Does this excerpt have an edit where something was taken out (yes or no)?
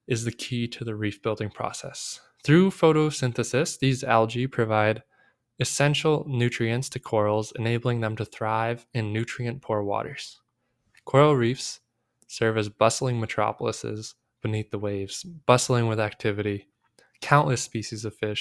no